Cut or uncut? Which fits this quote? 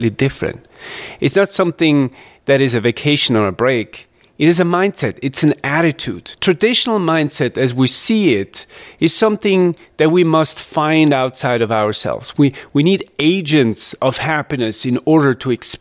uncut